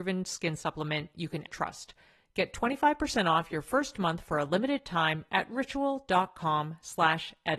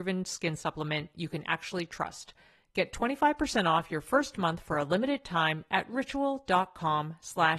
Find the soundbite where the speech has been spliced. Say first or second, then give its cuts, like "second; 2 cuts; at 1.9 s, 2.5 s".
first; 1 cut; at 1.5 s